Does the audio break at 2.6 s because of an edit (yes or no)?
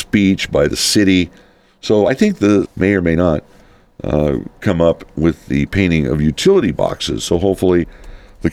yes